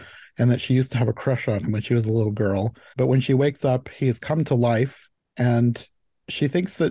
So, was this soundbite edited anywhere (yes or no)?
yes